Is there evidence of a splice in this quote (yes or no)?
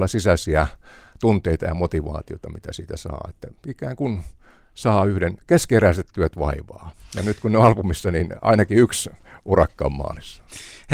no